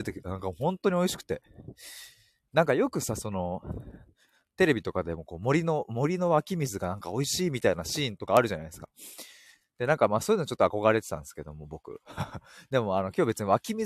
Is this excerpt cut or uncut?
uncut